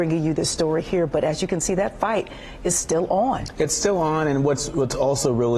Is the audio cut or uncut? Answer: uncut